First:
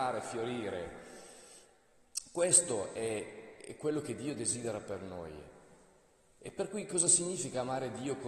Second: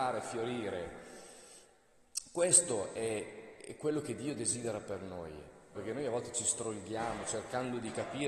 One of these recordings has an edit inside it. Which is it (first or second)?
second